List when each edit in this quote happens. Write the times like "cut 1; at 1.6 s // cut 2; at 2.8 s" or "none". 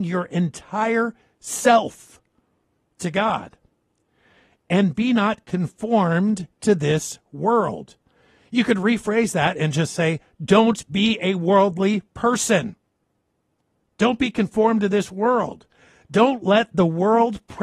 none